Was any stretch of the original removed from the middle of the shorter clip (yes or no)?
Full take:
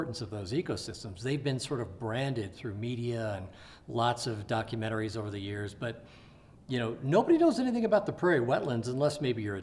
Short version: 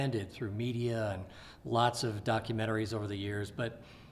no